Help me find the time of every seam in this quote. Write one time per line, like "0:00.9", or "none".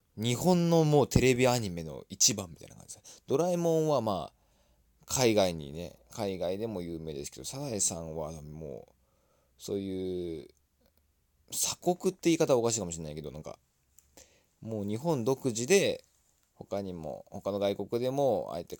none